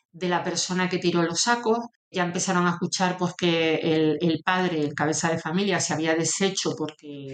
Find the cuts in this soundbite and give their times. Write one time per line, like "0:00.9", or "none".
none